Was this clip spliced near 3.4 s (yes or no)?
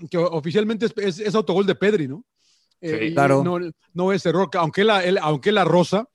no